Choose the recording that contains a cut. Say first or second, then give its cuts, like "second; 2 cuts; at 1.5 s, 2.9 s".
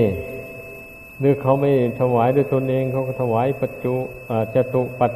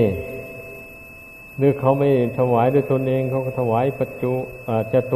first; 1 cut; at 1.1 s